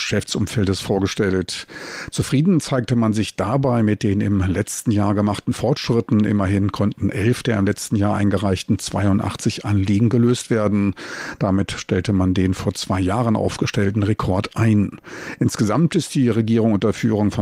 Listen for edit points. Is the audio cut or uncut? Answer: uncut